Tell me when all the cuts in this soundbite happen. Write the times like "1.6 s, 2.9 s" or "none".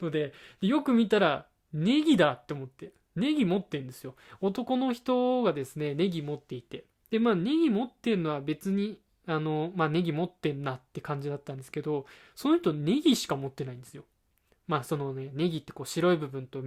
none